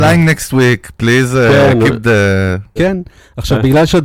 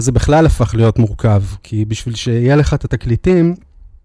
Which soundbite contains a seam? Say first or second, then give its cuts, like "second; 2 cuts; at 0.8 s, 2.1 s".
first; 1 cut; at 2.8 s